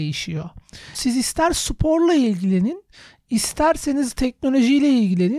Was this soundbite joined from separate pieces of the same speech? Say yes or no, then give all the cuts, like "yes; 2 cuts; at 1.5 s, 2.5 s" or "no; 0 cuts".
yes; 1 cut; at 0.9 s